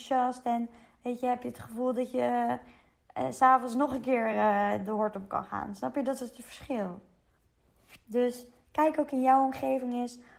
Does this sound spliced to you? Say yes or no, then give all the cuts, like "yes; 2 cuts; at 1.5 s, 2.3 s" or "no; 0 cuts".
no; 0 cuts